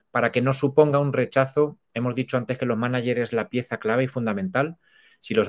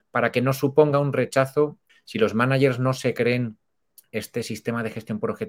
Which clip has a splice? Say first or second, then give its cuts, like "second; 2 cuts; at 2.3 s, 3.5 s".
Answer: second; 1 cut; at 1.9 s